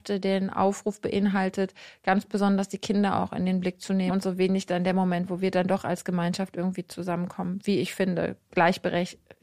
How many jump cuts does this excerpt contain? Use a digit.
1